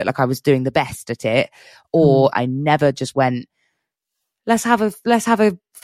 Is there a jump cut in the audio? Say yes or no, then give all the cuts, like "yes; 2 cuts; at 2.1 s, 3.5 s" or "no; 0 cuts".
yes; 1 cut; at 2.3 s